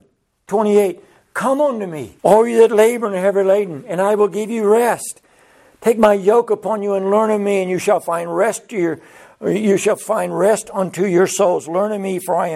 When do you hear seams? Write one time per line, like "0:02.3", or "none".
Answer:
0:02.2